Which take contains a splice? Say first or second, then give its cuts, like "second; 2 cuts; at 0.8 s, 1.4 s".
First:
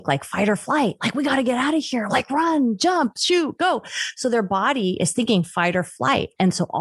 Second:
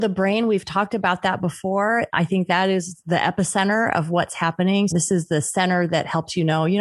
second; 1 cut; at 4.9 s